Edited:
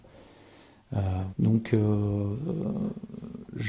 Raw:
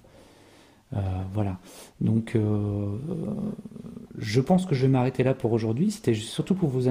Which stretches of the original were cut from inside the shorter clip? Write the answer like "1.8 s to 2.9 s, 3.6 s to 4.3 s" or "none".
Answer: 1.3 s to 1.9 s